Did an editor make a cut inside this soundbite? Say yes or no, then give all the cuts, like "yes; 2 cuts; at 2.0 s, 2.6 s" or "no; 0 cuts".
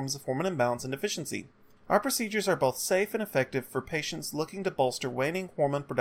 yes; 1 cut; at 1.8 s